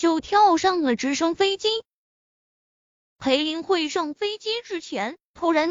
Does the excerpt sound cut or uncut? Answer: uncut